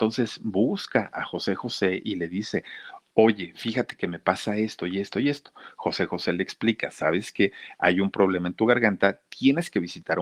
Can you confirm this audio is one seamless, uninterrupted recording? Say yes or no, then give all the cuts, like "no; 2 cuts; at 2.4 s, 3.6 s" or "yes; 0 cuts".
no; 1 cut; at 3.1 s